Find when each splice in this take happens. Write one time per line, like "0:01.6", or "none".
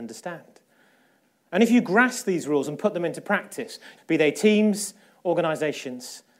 0:01.4
0:04.0